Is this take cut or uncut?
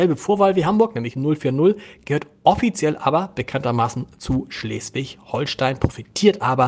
uncut